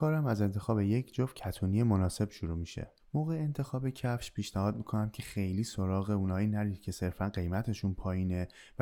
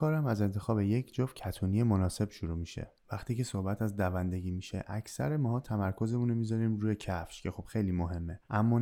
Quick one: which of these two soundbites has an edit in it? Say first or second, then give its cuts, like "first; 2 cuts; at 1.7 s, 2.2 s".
second; 1 cut; at 3.0 s